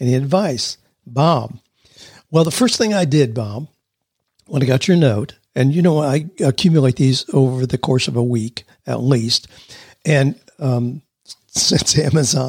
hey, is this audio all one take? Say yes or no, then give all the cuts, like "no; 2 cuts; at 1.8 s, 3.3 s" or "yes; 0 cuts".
yes; 0 cuts